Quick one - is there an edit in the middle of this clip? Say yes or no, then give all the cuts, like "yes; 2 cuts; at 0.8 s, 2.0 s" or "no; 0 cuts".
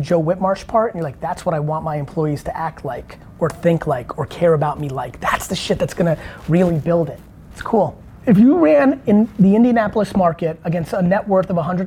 no; 0 cuts